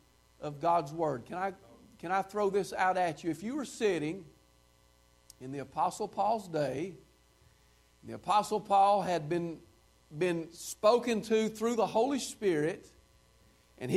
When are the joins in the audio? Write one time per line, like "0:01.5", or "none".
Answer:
none